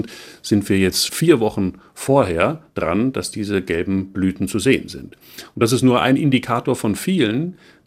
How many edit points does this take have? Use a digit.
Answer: 1